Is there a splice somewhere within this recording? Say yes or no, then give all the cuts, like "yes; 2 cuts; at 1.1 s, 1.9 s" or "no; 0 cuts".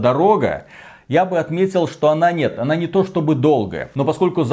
no; 0 cuts